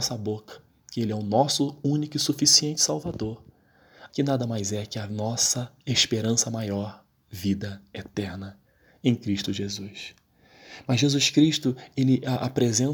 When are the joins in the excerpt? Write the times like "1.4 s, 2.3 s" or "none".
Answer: 4.1 s